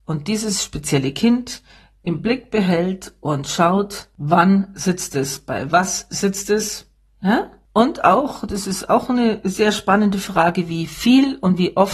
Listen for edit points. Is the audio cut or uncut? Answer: uncut